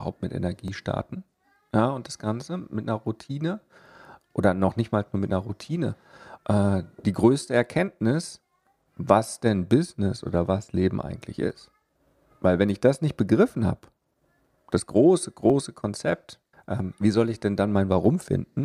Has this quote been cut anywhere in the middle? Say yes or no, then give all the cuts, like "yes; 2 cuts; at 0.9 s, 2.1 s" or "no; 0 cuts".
yes; 2 cuts; at 6.4 s, 16.5 s